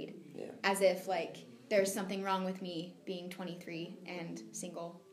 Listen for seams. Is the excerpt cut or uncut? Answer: uncut